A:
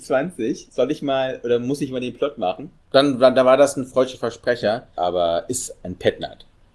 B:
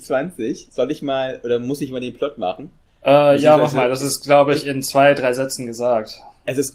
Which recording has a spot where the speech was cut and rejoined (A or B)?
A